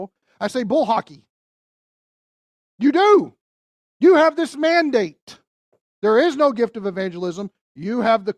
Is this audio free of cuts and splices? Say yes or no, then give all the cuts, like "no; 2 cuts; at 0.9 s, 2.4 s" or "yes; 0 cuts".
yes; 0 cuts